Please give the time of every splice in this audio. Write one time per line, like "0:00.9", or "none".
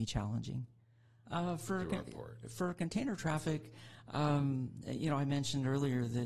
0:01.2